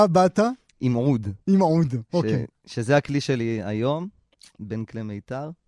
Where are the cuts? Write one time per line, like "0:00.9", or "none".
none